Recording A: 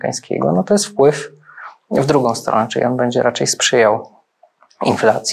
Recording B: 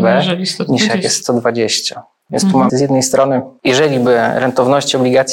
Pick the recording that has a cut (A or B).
B